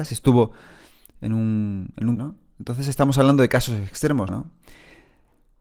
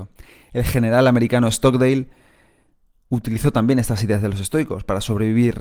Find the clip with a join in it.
first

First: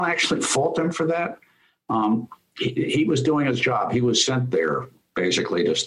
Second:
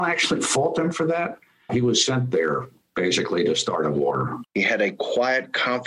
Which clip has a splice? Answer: second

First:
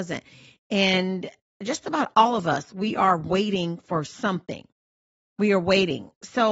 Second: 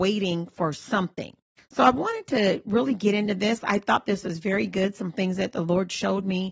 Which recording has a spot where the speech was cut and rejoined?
second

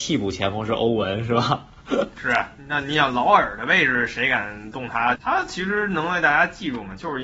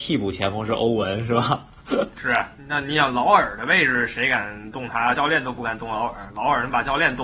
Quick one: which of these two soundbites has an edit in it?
first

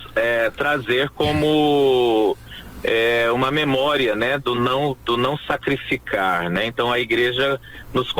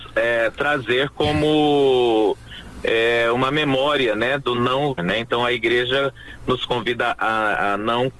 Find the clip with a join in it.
second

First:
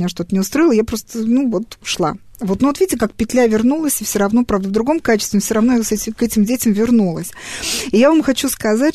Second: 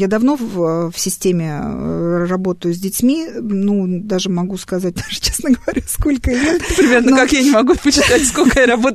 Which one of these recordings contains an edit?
second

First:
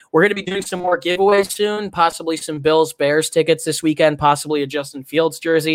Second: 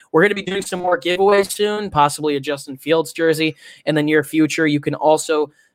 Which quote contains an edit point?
second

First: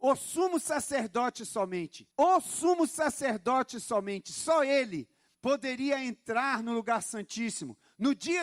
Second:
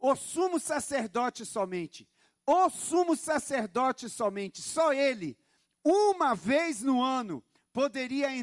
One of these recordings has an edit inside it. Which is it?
first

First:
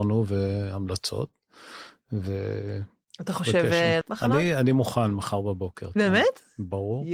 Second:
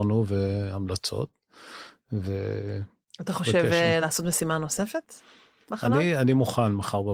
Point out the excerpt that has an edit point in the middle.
first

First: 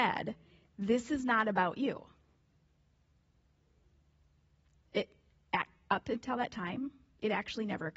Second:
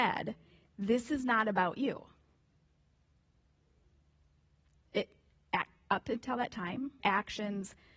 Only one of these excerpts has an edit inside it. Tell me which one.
second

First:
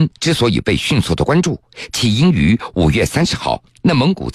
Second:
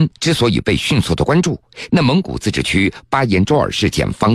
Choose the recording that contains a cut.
second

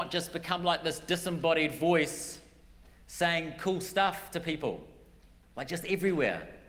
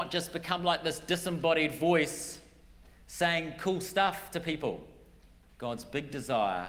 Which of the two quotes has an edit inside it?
second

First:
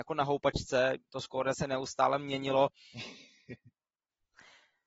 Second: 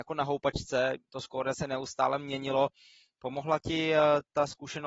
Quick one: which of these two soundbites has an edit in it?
first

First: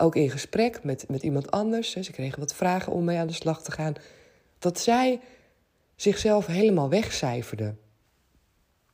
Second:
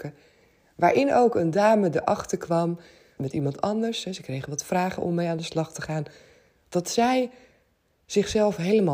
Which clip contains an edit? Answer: second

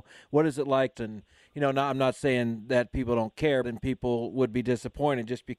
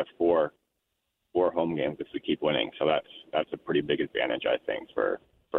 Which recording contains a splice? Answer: first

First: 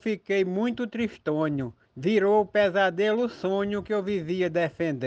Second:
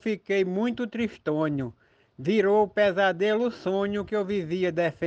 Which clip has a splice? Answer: first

